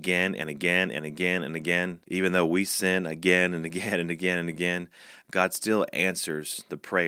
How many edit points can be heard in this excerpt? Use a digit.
1